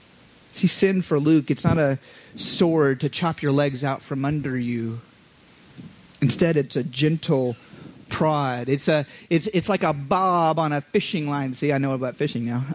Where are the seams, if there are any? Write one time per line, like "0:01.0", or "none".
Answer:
none